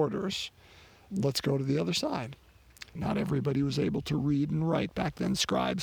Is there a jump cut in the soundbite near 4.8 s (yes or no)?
no